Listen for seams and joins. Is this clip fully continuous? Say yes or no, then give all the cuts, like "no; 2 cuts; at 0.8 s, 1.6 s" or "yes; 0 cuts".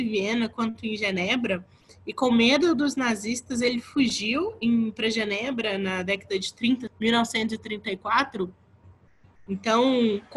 no; 2 cuts; at 6.9 s, 8.8 s